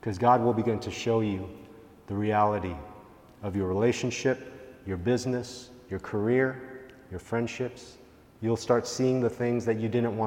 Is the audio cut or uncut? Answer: uncut